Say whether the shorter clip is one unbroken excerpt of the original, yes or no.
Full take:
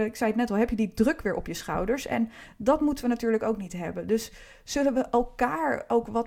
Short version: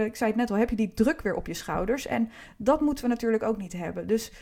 yes